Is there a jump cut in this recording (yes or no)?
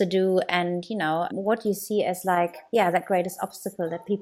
yes